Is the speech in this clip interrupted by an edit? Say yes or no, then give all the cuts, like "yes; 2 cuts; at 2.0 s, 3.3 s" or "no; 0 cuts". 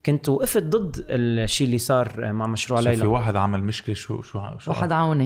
no; 0 cuts